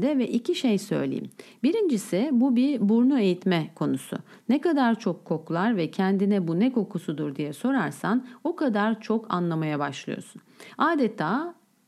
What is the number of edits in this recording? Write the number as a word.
zero